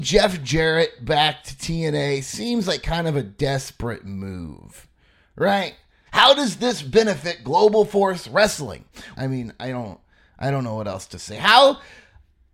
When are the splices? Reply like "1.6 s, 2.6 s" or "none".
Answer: 6.1 s, 9.1 s